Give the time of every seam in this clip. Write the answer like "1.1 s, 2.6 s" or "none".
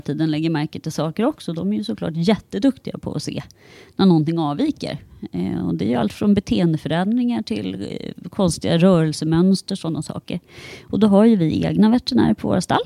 none